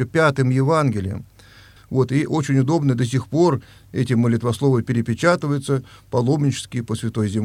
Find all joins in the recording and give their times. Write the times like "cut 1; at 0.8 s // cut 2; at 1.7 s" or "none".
cut 1; at 1.8 s